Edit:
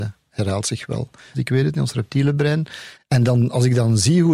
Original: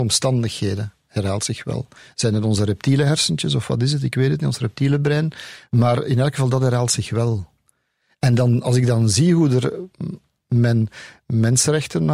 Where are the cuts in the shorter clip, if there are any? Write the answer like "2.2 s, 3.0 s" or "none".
1.3 s, 2.9 s